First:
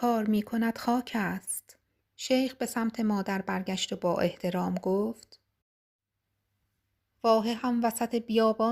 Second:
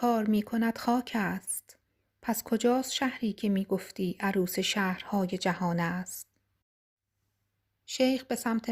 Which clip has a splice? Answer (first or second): first